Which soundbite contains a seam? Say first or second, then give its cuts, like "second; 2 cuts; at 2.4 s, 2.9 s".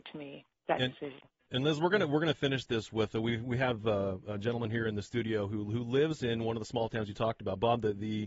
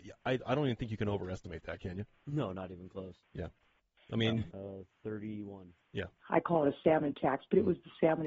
second; 2 cuts; at 4.5 s, 6.2 s